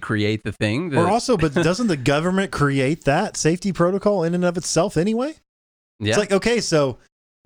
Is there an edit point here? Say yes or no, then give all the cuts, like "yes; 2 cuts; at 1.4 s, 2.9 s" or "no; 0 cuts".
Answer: no; 0 cuts